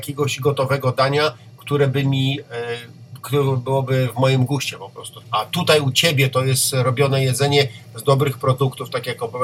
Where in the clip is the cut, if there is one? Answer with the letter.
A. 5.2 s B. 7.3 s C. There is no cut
A